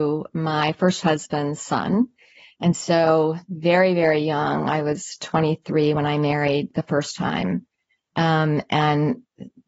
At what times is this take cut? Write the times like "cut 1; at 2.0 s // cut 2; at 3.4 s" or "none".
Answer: none